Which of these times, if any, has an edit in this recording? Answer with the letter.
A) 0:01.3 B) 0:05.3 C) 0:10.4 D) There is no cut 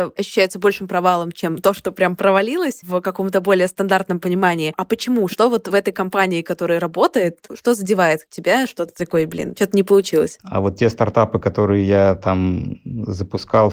C